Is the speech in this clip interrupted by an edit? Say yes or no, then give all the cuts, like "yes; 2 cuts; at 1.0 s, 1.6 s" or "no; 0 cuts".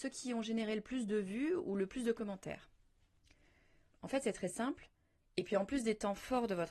yes; 1 cut; at 5.2 s